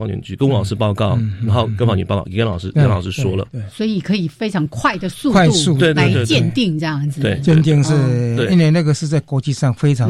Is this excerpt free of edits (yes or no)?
yes